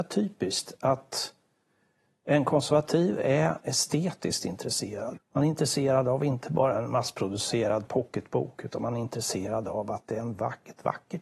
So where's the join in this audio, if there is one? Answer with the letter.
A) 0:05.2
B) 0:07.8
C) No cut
A